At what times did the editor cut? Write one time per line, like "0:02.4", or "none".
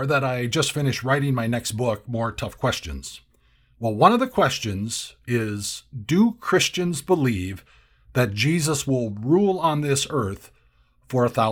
none